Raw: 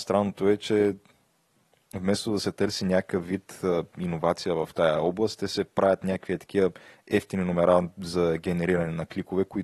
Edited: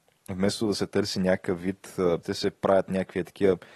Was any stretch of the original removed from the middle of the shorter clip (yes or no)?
yes